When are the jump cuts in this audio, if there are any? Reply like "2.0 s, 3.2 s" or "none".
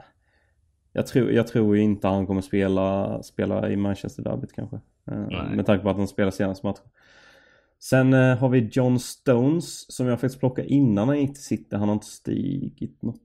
none